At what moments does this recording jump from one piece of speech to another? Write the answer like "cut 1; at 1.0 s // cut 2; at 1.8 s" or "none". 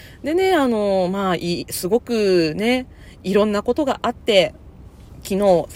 none